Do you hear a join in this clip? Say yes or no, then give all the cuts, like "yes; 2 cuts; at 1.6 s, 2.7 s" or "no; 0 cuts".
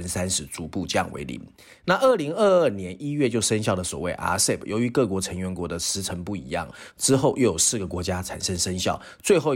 yes; 1 cut; at 6.9 s